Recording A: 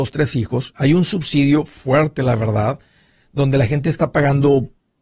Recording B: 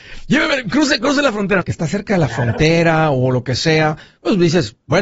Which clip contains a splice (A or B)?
B